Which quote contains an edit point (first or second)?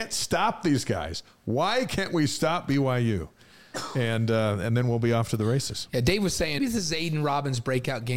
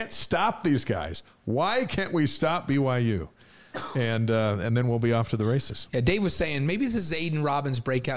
first